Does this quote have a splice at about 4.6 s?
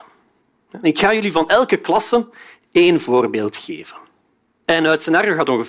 yes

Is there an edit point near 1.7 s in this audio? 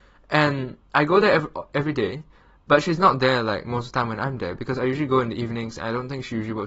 no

